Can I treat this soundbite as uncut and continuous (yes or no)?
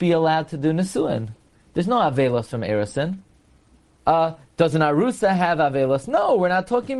no